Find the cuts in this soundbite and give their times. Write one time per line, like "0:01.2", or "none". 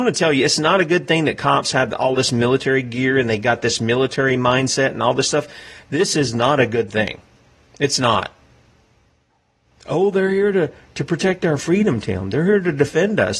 none